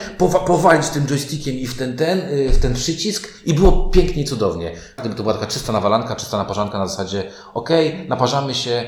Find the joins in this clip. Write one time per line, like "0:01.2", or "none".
0:05.0